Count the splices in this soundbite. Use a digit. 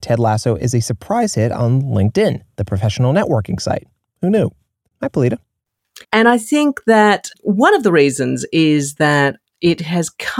2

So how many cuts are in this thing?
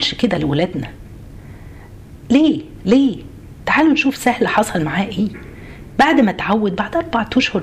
0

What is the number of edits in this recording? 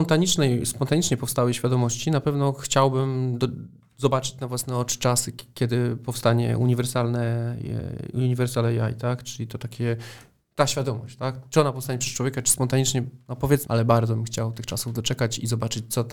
1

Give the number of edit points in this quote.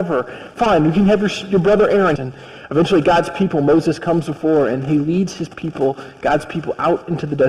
1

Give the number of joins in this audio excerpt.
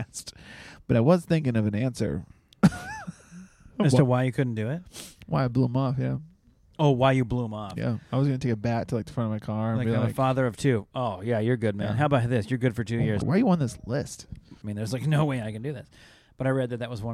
2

